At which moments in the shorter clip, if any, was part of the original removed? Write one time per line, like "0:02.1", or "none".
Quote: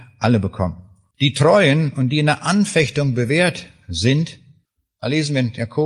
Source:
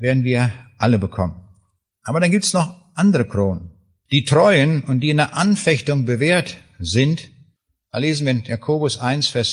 0:01.1